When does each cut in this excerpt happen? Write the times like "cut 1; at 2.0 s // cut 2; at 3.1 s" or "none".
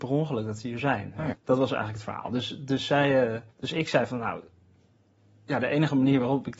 cut 1; at 1.3 s // cut 2; at 3.5 s